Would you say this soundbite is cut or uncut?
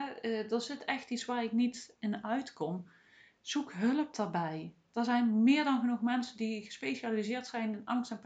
uncut